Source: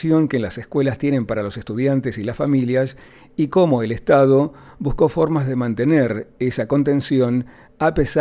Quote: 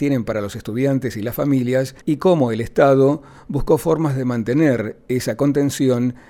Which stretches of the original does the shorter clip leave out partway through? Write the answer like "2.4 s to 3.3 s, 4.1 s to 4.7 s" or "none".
3.0 s to 3.3 s